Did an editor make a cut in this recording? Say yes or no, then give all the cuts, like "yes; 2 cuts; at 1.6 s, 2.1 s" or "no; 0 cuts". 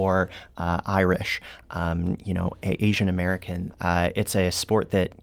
yes; 1 cut; at 3.7 s